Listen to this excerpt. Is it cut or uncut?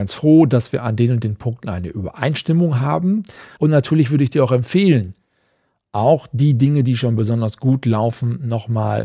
cut